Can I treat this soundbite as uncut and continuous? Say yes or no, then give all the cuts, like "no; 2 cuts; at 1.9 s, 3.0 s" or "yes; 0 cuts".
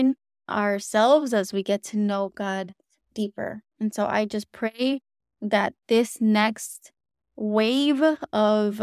yes; 0 cuts